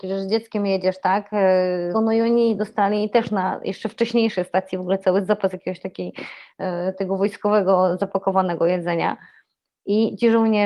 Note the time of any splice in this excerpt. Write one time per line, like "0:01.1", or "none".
0:01.9